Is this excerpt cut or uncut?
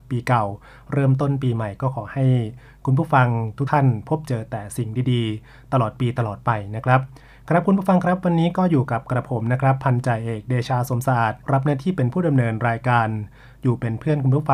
cut